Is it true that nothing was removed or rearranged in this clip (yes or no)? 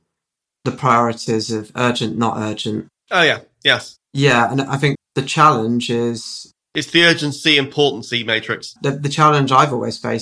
no